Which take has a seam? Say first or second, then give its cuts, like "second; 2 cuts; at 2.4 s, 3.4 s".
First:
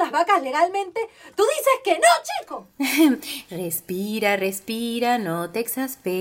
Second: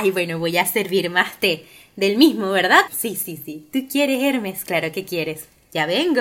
second; 1 cut; at 2.9 s